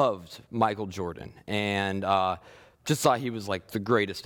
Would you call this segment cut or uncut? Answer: uncut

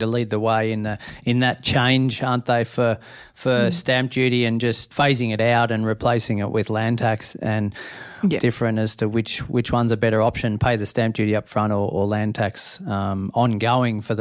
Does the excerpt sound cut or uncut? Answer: cut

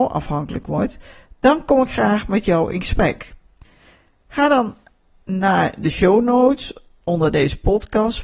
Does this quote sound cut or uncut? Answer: uncut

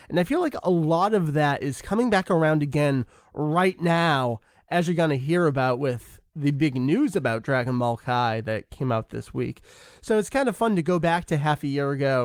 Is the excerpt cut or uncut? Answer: uncut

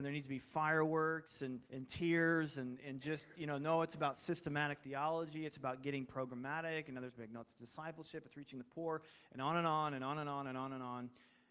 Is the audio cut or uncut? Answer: cut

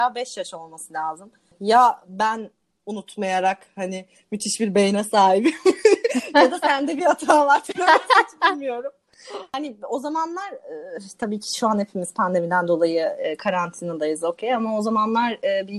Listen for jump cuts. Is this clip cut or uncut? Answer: uncut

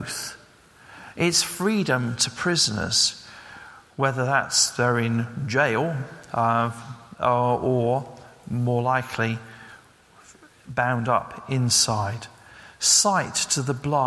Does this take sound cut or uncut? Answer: uncut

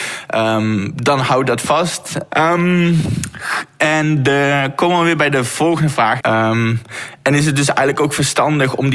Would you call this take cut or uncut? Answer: cut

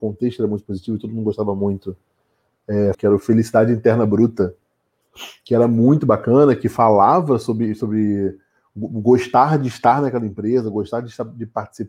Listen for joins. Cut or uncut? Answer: cut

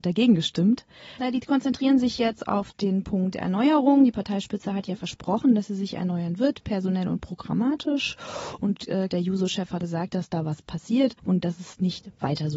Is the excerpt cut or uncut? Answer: cut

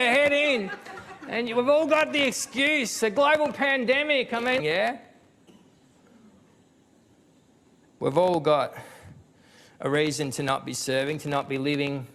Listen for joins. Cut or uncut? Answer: cut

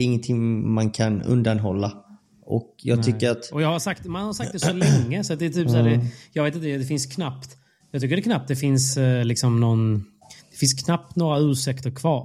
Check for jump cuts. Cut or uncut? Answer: uncut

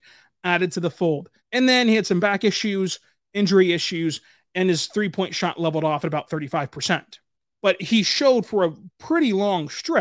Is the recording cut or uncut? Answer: cut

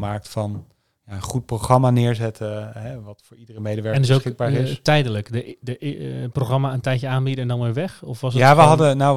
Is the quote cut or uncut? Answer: uncut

